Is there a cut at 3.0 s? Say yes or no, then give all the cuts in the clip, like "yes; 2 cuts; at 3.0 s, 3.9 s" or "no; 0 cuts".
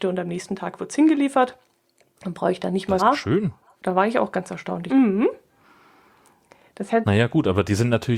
yes; 2 cuts; at 3.0 s, 4.9 s